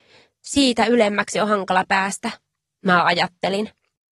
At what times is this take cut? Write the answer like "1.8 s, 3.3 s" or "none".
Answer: none